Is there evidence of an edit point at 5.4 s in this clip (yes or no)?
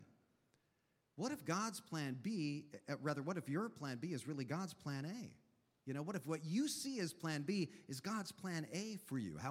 no